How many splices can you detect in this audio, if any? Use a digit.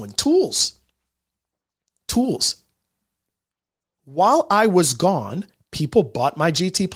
0